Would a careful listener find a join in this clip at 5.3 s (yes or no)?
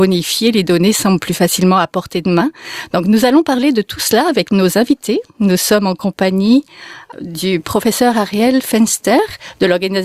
no